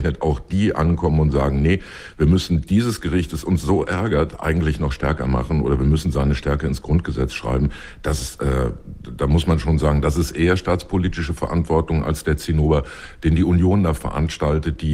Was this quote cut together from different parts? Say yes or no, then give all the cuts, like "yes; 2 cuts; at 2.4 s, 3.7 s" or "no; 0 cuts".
no; 0 cuts